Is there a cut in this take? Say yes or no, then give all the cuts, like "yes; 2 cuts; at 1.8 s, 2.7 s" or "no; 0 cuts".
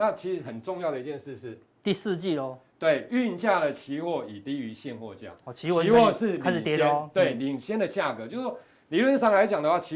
no; 0 cuts